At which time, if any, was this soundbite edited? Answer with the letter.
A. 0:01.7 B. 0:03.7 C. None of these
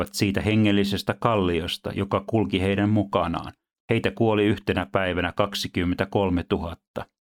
B